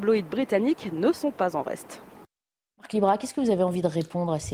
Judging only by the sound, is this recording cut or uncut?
uncut